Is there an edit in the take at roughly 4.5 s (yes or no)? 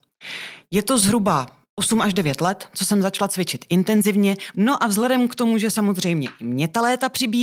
yes